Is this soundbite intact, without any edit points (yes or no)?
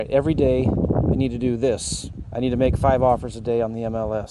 no